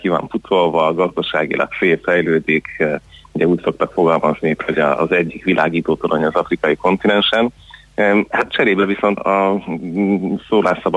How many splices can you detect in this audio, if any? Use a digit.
1